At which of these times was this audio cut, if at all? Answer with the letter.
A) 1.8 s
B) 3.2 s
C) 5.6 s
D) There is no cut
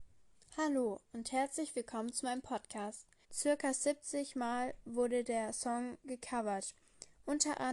B